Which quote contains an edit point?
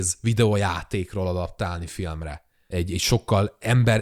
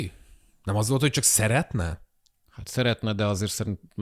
first; 1 cut; at 2.7 s

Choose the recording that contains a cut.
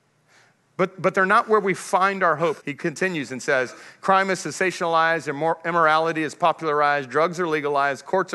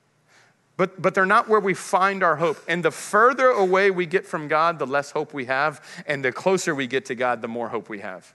first; 1 cut; at 2.6 s

